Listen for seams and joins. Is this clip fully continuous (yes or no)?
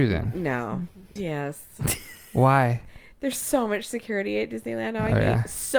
no